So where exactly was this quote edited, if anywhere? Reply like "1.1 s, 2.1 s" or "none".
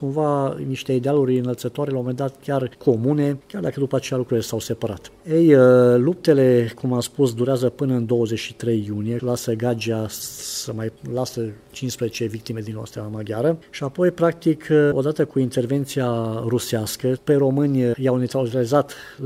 5.2 s, 9.2 s, 17.2 s